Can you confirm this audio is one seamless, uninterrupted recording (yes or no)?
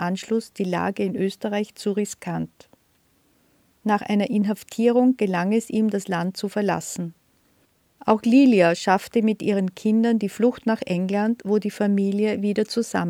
yes